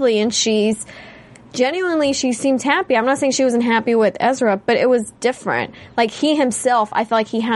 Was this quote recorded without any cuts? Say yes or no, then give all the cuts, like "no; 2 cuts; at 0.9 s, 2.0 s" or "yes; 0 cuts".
yes; 0 cuts